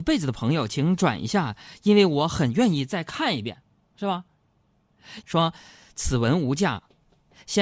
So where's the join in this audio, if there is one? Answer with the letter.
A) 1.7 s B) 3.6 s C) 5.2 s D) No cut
C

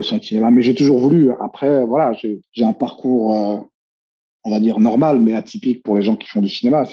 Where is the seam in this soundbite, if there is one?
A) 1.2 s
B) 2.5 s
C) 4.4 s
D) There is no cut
D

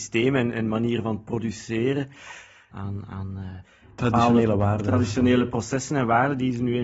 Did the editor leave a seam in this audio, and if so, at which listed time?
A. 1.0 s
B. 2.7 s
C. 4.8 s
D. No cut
B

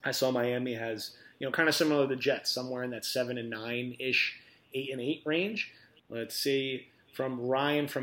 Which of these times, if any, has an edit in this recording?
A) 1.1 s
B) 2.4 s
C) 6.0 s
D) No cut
C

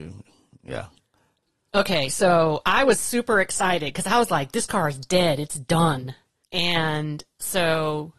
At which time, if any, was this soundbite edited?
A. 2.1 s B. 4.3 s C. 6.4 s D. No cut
C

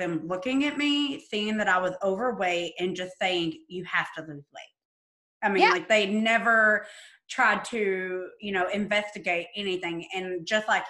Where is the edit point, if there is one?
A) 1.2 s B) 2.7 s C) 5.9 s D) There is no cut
D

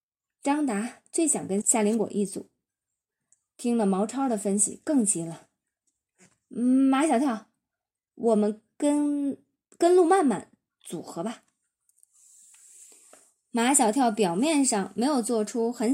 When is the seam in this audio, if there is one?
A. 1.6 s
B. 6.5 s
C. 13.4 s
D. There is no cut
A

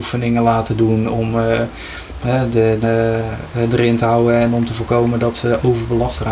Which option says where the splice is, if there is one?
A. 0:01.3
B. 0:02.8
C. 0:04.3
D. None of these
B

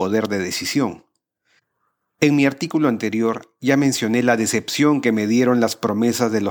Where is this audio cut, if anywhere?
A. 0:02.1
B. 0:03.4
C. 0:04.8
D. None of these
A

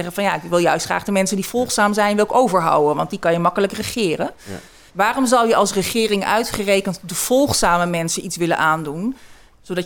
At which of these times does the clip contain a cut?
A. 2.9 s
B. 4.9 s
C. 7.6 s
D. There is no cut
B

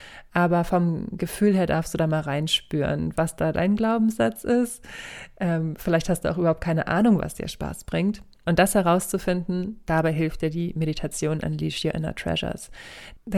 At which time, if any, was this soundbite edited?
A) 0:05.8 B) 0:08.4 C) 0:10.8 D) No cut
D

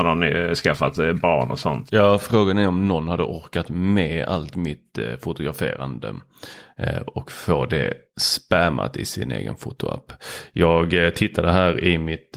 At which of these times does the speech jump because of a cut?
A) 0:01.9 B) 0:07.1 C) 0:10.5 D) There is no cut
A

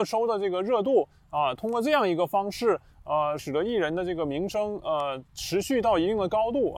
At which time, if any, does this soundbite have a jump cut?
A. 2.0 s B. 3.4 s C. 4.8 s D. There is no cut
B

